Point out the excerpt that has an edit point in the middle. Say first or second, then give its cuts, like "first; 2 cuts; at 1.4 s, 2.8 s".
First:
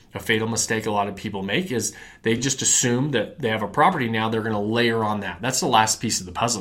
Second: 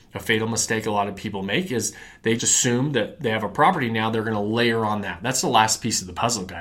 second; 1 cut; at 2.4 s